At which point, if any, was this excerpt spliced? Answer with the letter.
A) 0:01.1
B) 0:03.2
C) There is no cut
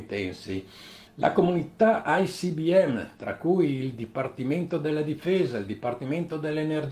A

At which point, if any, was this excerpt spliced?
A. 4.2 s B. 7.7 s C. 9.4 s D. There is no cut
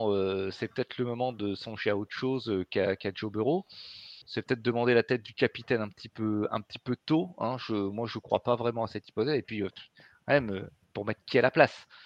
A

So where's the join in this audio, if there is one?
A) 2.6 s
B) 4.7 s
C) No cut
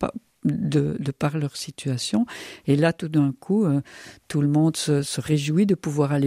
C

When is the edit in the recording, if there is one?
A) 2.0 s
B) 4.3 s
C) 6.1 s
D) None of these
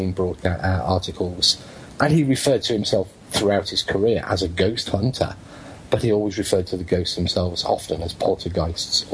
A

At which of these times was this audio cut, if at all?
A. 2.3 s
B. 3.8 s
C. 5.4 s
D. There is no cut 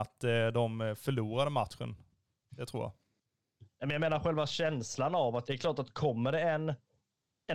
C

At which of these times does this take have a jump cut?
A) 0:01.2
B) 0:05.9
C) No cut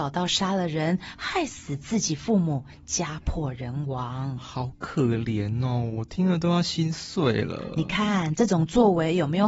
C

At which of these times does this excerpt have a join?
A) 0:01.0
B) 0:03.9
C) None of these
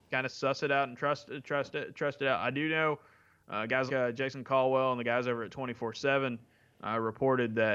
B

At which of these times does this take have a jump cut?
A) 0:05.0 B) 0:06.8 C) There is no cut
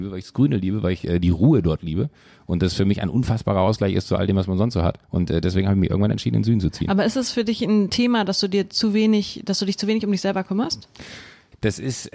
A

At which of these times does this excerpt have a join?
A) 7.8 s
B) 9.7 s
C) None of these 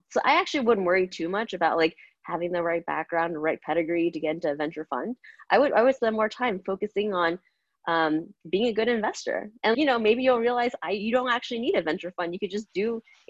B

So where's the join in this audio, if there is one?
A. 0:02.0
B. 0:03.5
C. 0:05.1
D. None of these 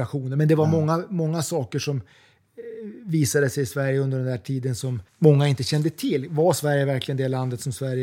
C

